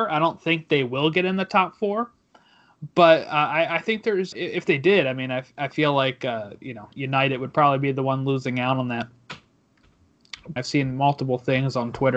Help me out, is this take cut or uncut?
cut